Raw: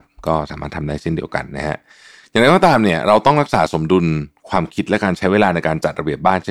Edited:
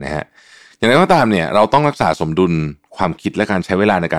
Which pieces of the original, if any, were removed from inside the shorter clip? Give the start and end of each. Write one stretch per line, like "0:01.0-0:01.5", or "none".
none